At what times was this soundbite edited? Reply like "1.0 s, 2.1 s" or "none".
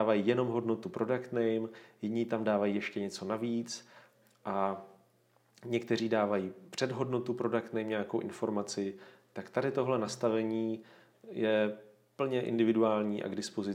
none